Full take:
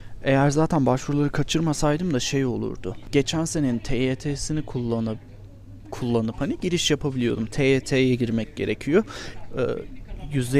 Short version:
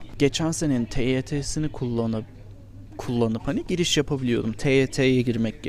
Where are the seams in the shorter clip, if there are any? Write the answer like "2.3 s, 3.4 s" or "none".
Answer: none